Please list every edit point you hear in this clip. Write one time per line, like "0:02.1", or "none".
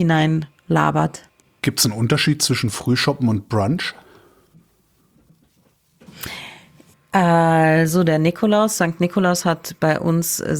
0:06.9